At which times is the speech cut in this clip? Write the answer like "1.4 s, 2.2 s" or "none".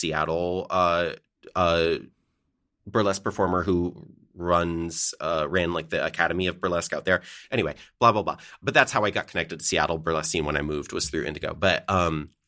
8.6 s